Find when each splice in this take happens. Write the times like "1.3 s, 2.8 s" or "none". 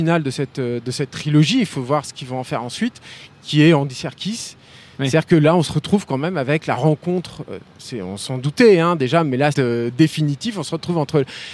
9.5 s